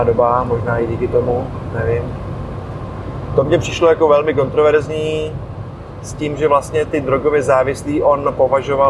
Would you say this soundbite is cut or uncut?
uncut